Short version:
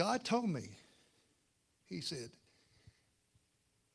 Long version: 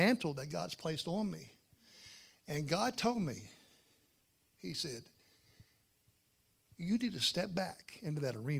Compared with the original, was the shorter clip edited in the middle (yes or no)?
no